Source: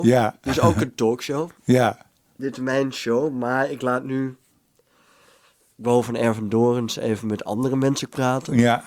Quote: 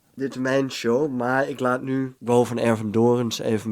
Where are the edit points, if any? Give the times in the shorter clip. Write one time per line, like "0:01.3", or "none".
0:02.2